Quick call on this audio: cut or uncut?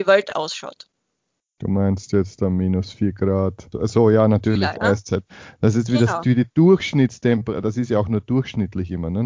uncut